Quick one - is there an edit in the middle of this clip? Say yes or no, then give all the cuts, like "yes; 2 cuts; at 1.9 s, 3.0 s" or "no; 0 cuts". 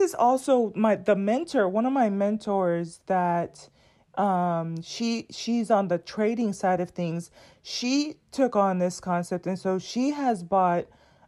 no; 0 cuts